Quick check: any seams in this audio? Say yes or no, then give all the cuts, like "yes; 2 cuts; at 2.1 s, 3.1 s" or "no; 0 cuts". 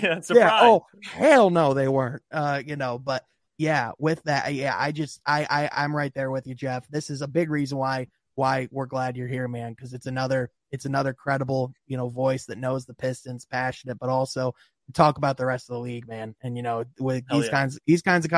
no; 0 cuts